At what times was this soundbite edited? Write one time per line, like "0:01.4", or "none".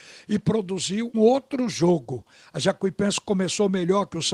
0:01.1